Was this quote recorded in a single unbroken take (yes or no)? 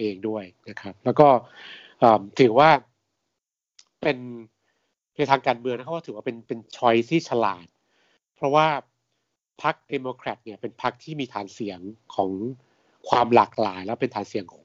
yes